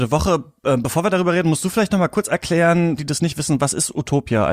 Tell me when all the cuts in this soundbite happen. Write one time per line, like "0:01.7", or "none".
0:03.0